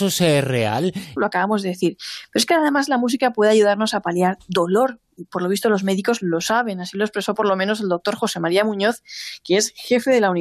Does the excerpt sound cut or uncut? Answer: cut